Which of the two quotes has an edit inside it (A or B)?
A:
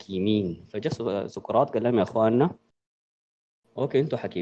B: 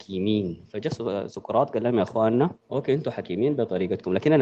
B